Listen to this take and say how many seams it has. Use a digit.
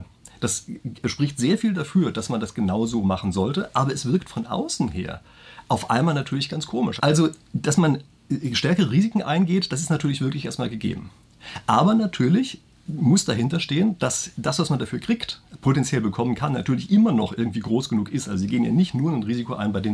1